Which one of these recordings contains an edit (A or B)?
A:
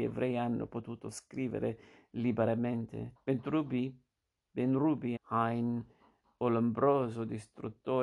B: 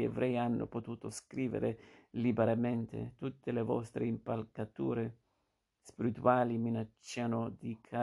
A